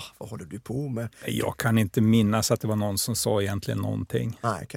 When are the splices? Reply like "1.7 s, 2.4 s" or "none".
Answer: 1.2 s